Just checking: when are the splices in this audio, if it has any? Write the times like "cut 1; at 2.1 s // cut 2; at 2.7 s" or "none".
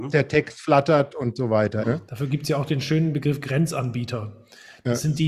cut 1; at 1.8 s